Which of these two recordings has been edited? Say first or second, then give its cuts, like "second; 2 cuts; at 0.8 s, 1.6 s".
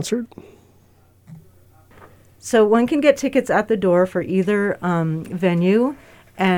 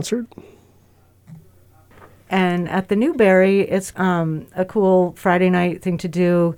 second; 2 cuts; at 2.2 s, 3.9 s